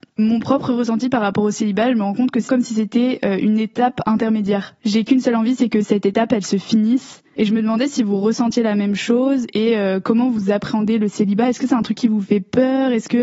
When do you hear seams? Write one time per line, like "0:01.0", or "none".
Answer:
0:02.5